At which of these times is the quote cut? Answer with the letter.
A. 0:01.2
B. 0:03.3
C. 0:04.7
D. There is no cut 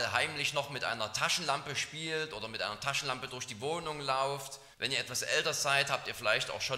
C